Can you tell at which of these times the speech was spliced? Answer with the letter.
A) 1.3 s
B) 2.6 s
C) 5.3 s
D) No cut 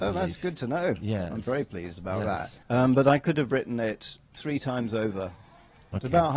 B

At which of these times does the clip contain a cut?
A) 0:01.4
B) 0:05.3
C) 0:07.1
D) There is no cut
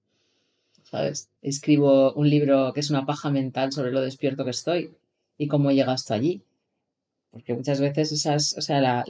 A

